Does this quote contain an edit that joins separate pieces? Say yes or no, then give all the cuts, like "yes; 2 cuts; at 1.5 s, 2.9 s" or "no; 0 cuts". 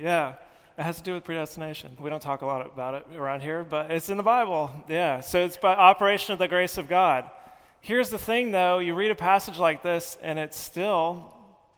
yes; 1 cut; at 2.0 s